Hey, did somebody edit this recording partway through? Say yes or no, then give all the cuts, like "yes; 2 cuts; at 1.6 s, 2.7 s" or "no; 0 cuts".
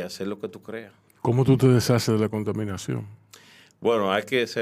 yes; 1 cut; at 1.1 s